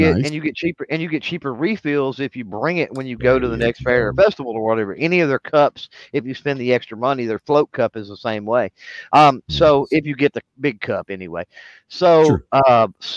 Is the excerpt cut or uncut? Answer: uncut